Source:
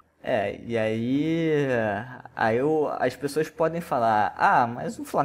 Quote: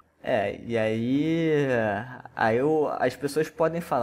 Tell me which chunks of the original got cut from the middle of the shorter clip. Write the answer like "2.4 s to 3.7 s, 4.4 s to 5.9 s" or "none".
none